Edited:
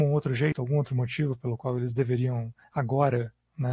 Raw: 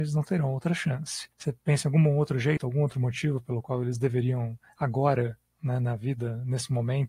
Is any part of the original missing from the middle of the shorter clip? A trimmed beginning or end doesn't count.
no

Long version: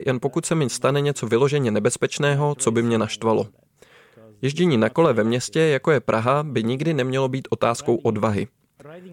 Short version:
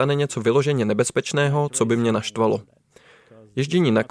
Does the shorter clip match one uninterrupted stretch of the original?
yes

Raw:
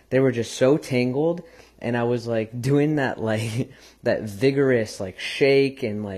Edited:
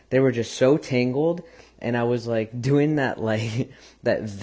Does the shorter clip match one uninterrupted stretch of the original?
yes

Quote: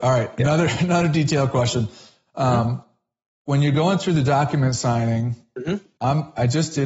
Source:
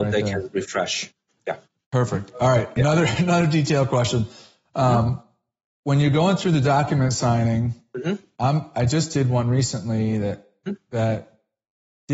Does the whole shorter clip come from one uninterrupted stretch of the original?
yes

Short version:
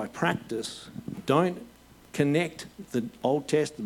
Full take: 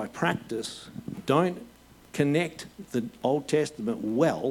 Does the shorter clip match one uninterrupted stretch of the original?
yes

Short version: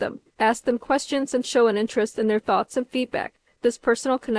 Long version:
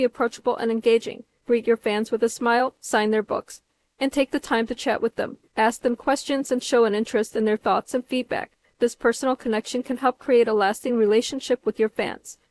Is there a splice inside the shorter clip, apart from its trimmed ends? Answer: no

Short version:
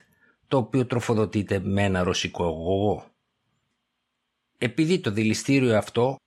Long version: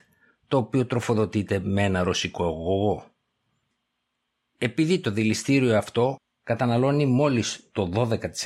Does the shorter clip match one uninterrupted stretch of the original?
yes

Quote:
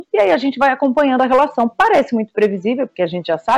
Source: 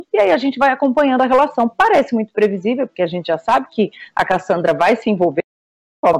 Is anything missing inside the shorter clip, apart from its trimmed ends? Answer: no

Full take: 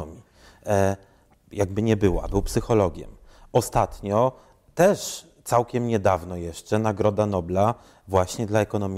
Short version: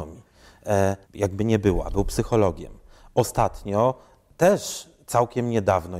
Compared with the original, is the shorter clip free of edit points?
no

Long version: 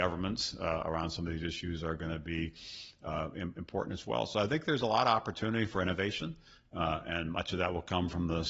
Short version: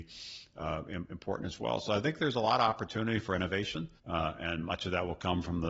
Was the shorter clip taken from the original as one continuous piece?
no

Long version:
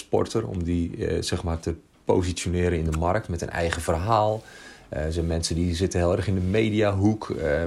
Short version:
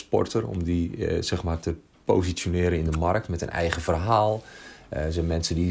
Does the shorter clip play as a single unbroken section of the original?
yes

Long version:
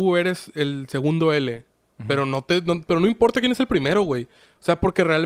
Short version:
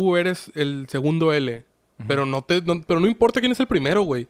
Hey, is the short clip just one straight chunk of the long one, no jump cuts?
yes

